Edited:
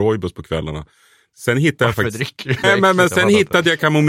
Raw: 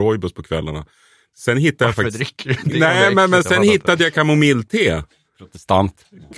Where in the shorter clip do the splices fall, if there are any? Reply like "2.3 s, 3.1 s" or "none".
2.6 s